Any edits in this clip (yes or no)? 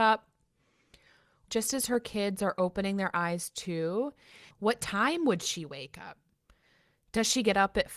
yes